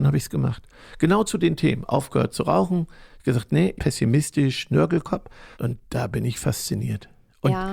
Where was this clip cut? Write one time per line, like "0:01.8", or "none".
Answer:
0:03.8
0:05.5

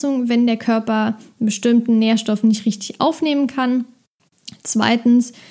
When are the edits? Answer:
none

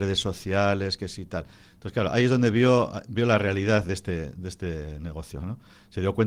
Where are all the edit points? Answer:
none

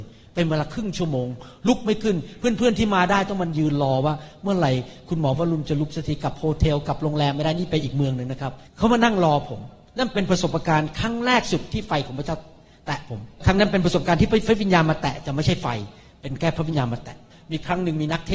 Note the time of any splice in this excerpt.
0:08.7

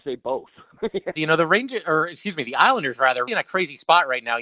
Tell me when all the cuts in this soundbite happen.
0:01.2
0:03.3

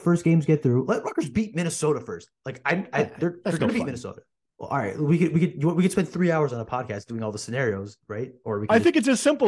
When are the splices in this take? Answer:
0:04.4

